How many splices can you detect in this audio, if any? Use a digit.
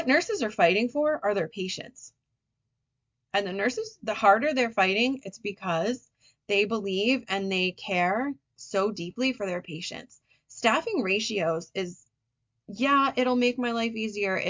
0